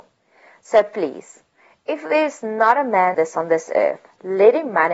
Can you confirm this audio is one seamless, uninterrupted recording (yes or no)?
no